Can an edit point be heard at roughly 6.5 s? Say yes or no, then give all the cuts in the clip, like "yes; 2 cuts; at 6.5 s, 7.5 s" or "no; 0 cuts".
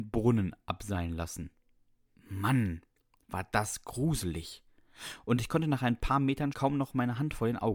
yes; 1 cut; at 6.5 s